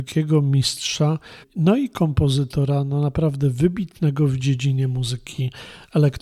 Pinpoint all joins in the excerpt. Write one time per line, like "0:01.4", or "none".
0:01.4